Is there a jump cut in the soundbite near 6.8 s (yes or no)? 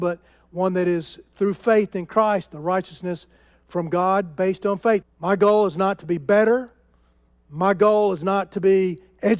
no